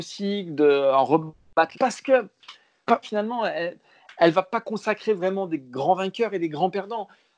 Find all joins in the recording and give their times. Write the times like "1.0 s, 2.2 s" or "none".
1.7 s, 3.0 s